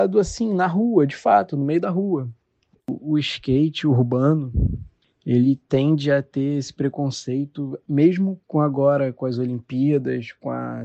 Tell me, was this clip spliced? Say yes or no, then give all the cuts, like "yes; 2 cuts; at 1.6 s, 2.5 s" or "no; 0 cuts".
yes; 2 cuts; at 2.8 s, 8.4 s